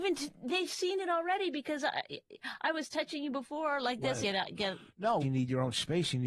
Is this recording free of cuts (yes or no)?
no